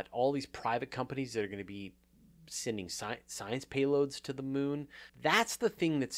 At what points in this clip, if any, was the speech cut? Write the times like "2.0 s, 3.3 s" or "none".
5.1 s